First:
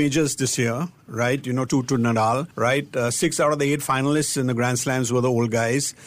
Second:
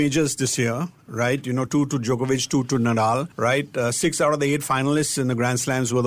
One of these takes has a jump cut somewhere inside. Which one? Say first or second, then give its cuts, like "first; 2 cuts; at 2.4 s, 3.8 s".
first; 1 cut; at 1.7 s